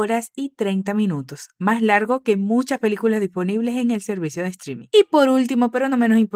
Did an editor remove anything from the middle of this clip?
yes; 1 cut; at 4.9 s

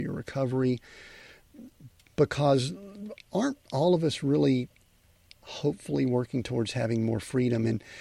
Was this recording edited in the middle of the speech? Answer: no; 0 cuts

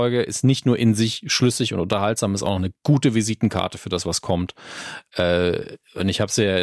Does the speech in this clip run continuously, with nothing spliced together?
no; 1 cut; at 5.1 s

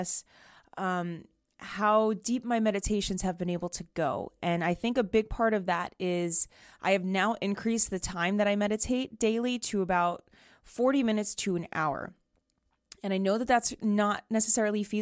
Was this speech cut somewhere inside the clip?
no; 0 cuts

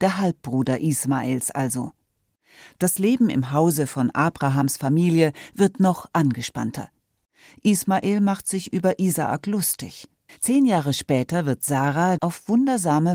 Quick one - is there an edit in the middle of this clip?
yes; 2 cuts; at 10.3 s, 12.2 s

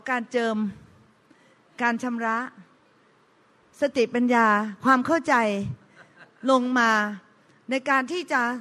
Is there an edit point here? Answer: no; 0 cuts

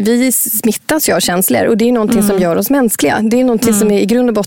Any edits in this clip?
no; 0 cuts

